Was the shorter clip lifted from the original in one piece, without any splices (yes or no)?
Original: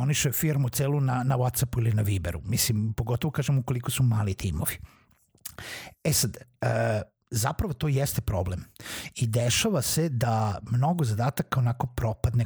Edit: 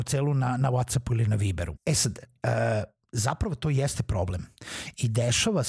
no